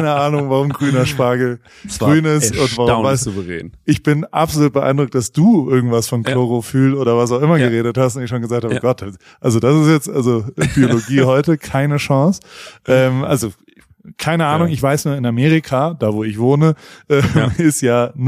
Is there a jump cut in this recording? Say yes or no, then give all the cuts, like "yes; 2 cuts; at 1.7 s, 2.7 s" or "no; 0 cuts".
no; 0 cuts